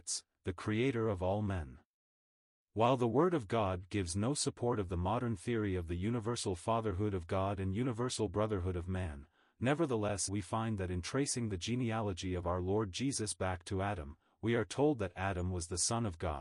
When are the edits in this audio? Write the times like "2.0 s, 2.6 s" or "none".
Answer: 10.3 s